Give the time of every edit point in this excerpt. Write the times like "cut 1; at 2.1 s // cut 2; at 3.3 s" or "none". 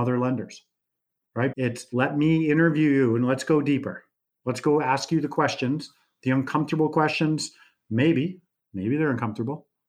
cut 1; at 1.5 s